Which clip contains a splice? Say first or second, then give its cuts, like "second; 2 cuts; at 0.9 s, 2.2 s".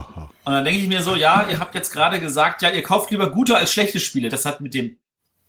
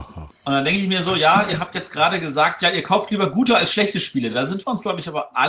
first; 1 cut; at 4.3 s